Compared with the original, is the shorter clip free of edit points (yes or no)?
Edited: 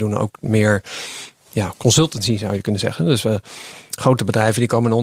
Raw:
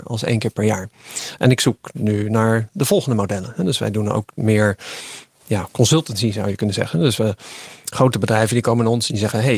yes